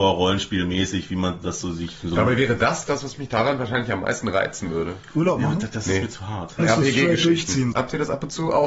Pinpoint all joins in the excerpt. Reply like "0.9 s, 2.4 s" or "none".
6.6 s, 7.7 s